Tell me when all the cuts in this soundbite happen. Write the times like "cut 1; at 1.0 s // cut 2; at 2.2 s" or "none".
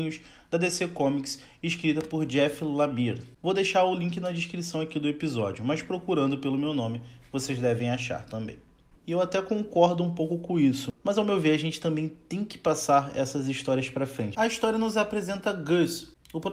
cut 1; at 3.4 s // cut 2; at 9.0 s // cut 3; at 14.3 s